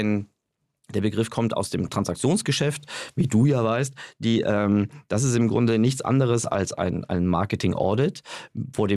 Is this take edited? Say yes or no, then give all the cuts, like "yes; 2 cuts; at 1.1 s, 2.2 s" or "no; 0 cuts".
no; 0 cuts